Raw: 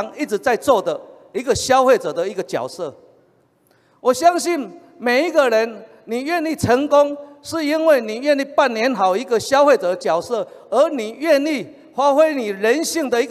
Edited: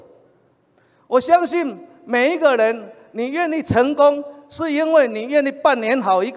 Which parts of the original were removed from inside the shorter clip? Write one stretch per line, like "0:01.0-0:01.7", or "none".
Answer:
none